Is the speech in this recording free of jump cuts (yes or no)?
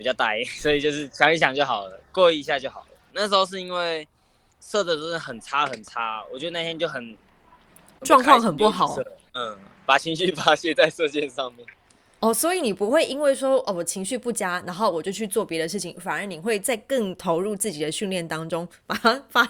no